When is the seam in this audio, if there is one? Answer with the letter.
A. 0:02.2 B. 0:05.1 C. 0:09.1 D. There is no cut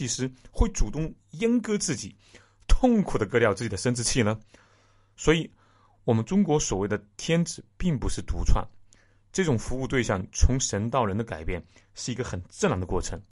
B